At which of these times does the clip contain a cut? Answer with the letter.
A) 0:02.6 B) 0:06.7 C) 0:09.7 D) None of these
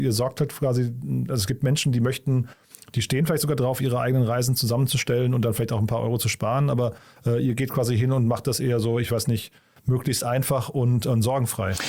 D